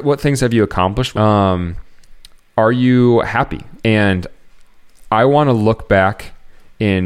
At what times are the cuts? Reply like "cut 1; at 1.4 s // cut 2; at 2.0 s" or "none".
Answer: cut 1; at 1.1 s // cut 2; at 3.8 s